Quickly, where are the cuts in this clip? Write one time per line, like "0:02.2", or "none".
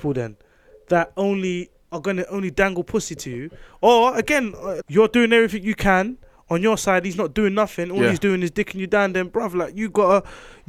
0:04.8